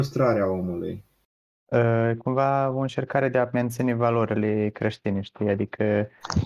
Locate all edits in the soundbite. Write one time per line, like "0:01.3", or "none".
0:01.5